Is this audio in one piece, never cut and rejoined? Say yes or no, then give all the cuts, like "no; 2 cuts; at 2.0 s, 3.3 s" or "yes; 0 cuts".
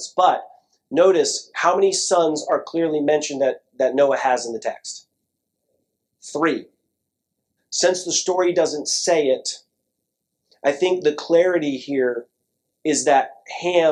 no; 1 cut; at 7.6 s